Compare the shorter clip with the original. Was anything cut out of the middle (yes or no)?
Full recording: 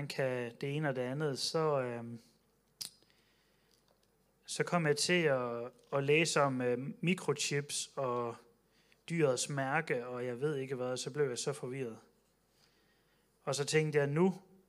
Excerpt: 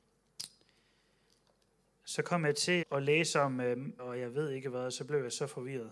yes